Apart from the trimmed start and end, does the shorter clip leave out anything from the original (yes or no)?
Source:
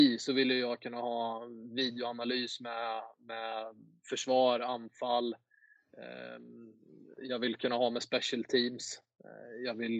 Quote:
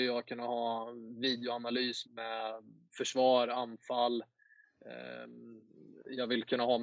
yes